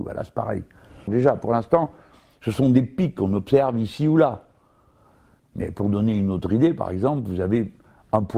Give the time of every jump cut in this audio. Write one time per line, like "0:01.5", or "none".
0:01.1
0:05.4